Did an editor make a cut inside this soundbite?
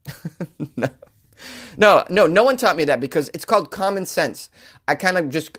no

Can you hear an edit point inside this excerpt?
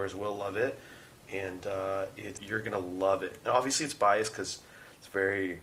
yes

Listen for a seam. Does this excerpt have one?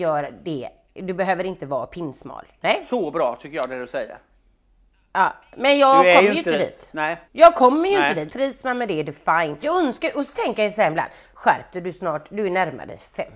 yes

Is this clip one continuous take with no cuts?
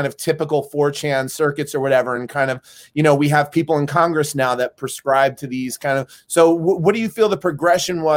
yes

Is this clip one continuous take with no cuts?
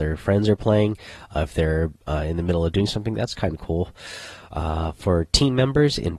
yes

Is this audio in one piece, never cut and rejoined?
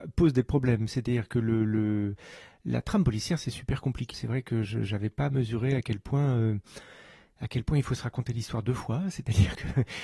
no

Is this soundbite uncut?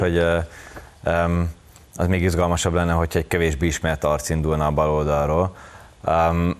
yes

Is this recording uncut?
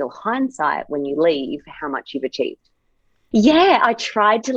no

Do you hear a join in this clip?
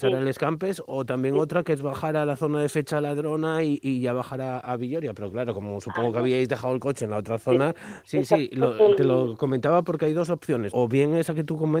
yes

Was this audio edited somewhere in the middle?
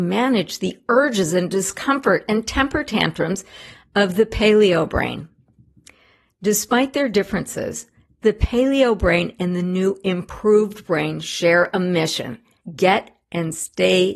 no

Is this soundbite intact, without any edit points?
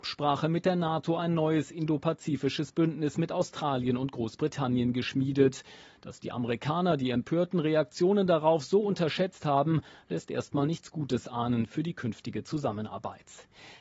yes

